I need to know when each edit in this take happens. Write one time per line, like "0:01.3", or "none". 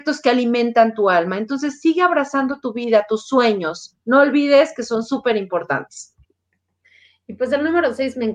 none